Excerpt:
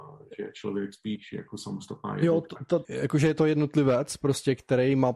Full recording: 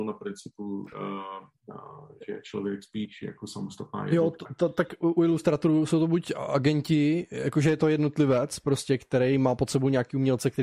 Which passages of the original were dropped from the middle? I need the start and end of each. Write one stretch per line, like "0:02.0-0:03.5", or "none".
0:04.7-0:07.3